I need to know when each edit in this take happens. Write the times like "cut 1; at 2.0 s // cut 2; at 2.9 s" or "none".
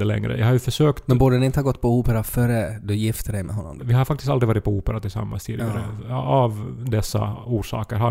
cut 1; at 3.8 s